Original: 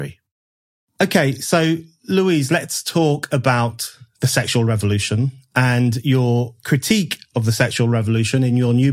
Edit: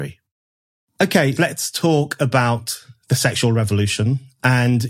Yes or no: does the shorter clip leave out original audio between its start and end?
yes